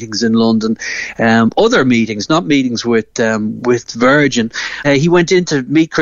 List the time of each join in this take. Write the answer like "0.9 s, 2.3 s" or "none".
3.6 s, 4.8 s